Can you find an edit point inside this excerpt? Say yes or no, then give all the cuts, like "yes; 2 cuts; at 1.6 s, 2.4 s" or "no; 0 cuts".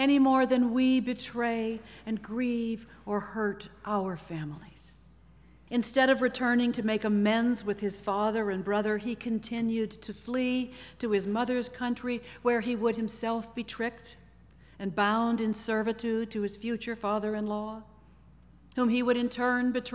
yes; 1 cut; at 5.7 s